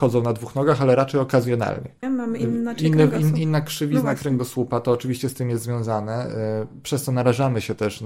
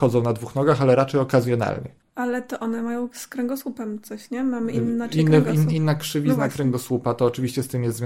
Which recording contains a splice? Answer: first; 1 cut; at 2.0 s

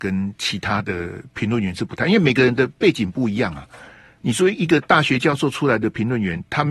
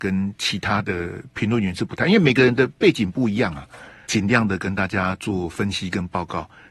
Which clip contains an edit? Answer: second; 1 cut; at 4.0 s

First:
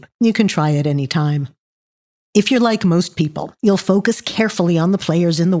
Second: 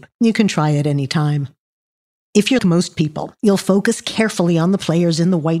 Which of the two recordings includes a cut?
second; 1 cut; at 2.6 s

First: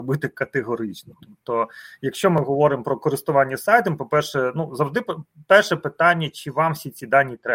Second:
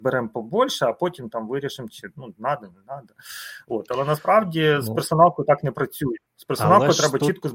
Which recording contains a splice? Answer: second; 1 cut; at 6.3 s

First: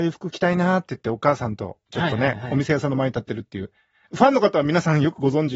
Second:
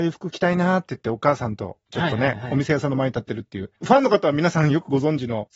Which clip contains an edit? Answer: second; 1 cut; at 3.8 s

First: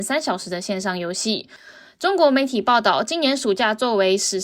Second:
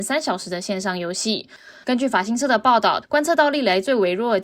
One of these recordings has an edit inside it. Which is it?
second; 2 cuts; at 1.8 s, 3.0 s

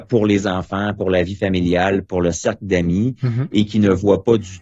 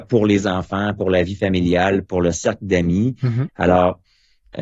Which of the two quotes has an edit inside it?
second; 1 cut; at 3.5 s

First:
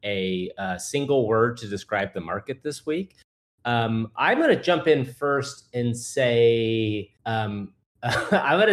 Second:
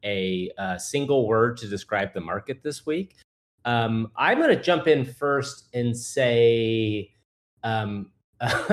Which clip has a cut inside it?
first; 1 cut; at 7.2 s

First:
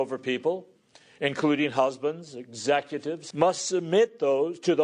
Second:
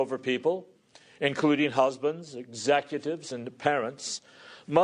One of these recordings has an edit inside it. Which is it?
first; 1 cut; at 3.3 s

